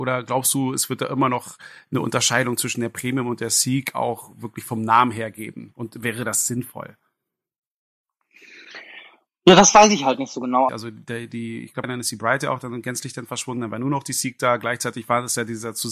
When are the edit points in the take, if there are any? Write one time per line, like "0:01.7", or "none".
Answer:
0:10.7
0:11.8